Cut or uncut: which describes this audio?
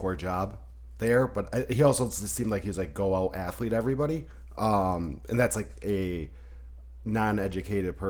uncut